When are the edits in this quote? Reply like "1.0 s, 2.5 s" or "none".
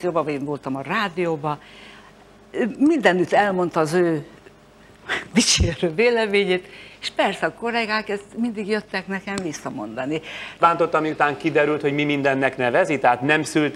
10.6 s